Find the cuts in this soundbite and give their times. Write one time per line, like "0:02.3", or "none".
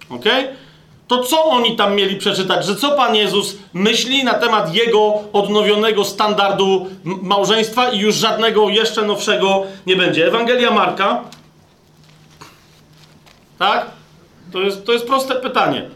0:13.5
0:14.5